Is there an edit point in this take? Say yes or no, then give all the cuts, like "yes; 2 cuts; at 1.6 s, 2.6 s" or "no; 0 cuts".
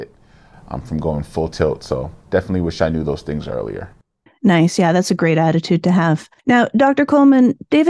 yes; 3 cuts; at 2.2 s, 4.3 s, 6.4 s